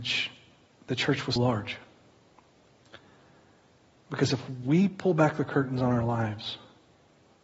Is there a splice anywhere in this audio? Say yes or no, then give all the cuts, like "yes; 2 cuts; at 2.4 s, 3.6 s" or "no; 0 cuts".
yes; 1 cut; at 1.4 s